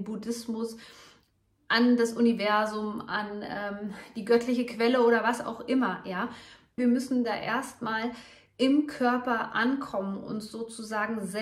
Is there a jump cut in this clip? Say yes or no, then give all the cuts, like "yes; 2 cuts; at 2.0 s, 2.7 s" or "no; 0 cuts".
yes; 1 cut; at 6.8 s